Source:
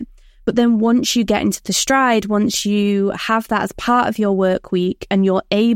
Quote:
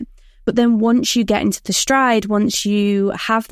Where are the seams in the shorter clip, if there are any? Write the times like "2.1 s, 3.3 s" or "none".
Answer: none